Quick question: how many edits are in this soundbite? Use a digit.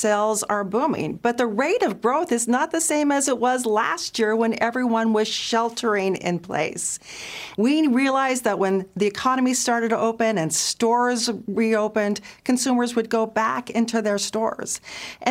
1